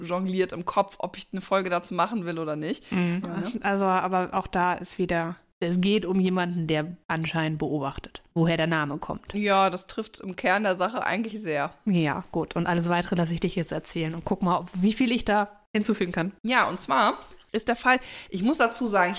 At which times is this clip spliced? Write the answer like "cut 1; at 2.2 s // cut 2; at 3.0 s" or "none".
cut 1; at 3.2 s